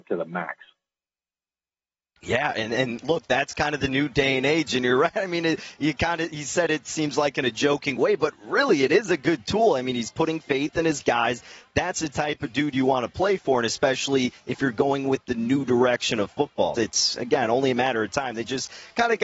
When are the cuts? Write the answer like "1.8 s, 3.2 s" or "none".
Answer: 16.8 s